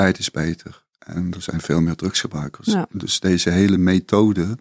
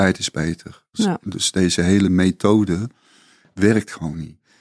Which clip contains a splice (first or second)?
second